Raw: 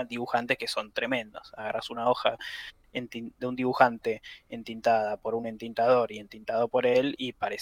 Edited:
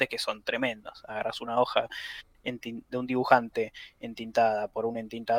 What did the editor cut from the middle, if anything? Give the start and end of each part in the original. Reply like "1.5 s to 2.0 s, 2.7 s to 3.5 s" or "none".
none